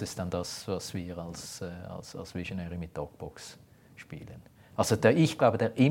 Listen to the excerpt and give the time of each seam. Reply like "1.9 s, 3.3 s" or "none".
none